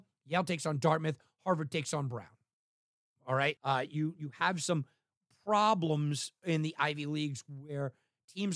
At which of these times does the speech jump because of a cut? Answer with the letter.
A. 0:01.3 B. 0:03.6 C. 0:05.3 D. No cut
B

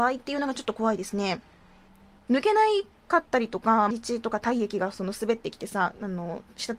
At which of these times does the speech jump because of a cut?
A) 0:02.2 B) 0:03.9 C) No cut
B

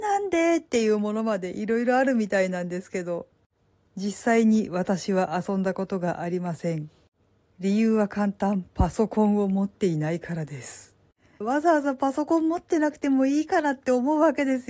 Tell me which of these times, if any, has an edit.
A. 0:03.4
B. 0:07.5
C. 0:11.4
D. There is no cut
C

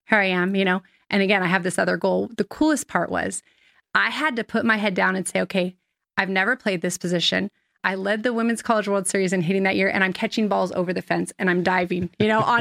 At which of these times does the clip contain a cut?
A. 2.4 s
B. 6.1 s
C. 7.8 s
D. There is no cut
C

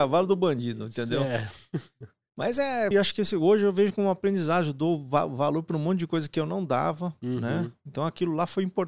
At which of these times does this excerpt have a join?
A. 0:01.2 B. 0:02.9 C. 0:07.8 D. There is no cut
B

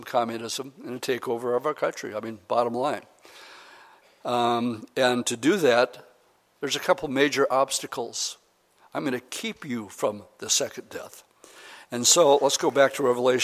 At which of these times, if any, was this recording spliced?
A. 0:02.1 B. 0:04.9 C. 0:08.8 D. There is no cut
C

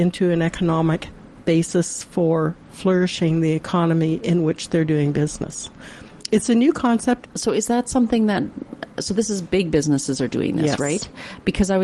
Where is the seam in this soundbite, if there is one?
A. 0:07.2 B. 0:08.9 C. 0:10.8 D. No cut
A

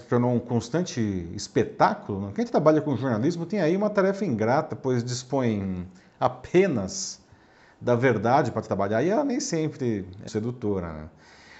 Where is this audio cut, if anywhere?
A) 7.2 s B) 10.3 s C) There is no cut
B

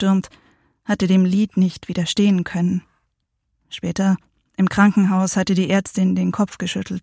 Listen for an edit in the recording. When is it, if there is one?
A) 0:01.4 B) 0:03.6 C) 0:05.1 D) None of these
B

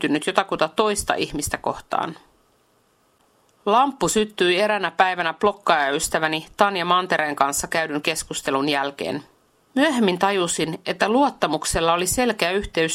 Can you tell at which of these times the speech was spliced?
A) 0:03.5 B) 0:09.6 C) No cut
B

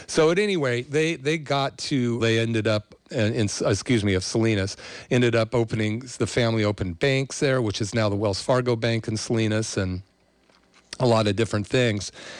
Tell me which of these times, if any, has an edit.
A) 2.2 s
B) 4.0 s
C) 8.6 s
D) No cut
A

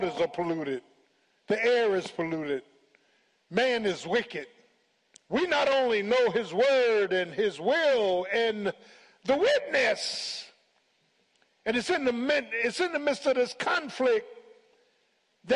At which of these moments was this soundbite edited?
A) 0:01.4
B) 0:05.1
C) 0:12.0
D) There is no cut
B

